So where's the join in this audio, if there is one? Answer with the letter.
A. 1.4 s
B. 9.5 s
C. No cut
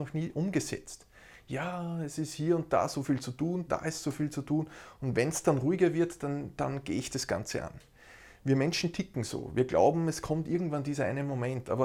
C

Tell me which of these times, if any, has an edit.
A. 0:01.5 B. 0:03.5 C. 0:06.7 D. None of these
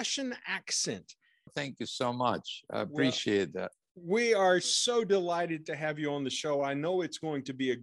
A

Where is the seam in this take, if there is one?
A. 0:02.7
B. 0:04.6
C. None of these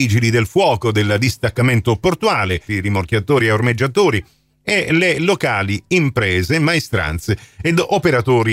A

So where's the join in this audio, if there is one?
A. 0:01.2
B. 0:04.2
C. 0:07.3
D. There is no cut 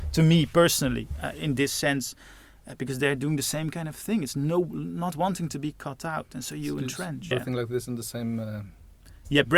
C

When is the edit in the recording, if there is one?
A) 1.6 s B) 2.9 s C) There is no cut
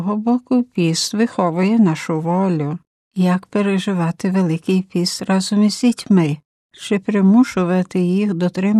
C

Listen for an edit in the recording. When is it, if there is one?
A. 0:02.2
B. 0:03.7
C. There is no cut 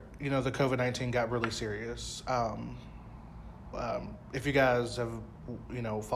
B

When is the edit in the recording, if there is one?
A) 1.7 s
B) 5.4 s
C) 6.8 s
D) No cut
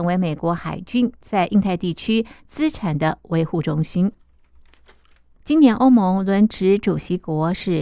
B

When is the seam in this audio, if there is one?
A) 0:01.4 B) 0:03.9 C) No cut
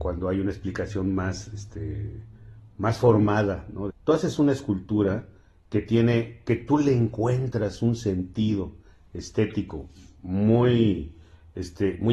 B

